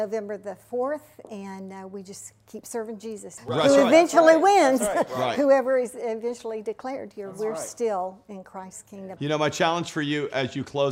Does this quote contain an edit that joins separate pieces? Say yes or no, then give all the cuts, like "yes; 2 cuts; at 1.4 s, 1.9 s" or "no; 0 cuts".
yes; 2 cuts; at 3.4 s, 9.2 s